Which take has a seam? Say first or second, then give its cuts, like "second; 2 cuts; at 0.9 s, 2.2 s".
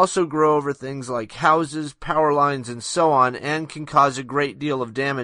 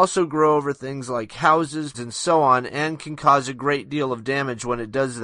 second; 1 cut; at 1.9 s